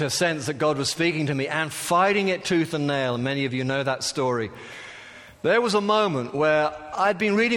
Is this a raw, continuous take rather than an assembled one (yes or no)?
yes